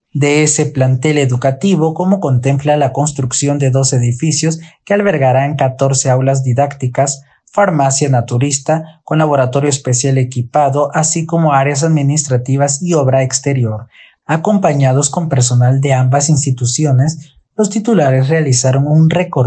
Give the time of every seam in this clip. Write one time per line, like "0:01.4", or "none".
0:14.2